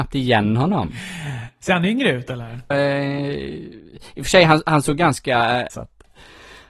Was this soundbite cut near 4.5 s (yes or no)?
no